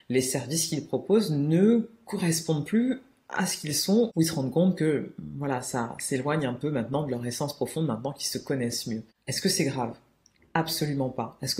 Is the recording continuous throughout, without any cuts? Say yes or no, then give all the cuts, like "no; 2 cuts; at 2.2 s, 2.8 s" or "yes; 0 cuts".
yes; 0 cuts